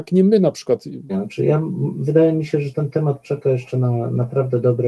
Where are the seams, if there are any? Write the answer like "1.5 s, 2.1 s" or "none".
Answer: 1.1 s